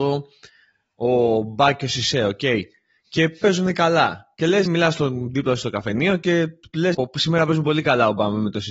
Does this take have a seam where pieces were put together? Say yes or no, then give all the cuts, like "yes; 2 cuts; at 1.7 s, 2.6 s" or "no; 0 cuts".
yes; 2 cuts; at 4.7 s, 6.9 s